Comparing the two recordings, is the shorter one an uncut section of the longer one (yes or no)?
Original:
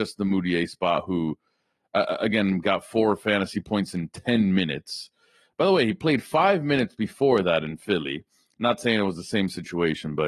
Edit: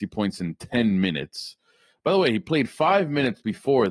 yes